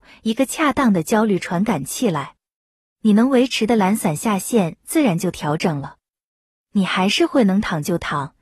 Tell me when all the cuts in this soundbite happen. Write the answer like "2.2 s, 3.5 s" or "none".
none